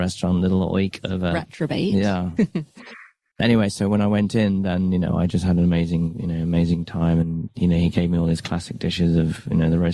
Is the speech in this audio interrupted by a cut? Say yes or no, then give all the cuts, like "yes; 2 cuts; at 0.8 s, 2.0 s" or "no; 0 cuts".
no; 0 cuts